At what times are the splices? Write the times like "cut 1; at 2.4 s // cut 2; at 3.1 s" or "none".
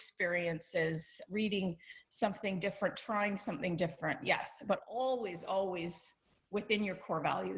none